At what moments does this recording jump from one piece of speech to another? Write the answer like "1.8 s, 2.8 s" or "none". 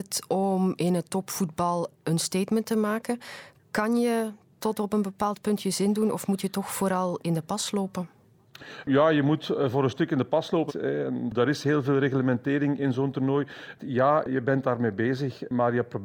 10.7 s, 13.8 s